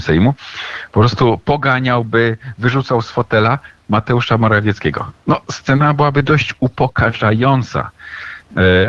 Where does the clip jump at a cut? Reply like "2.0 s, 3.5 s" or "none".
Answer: none